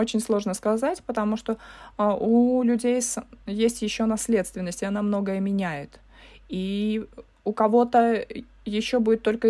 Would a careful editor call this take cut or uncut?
uncut